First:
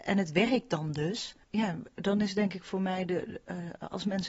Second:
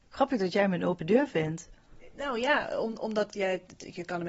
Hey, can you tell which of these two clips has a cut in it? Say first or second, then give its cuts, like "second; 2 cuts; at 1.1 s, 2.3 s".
first; 1 cut; at 1.4 s